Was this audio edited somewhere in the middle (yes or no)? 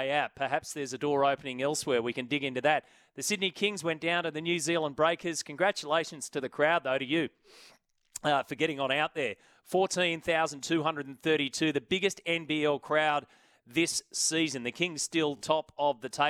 no